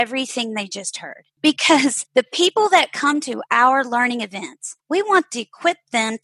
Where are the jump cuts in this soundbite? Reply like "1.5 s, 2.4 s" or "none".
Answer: 4.8 s